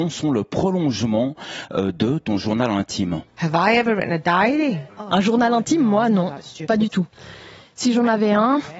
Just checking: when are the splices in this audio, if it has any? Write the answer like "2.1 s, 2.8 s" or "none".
none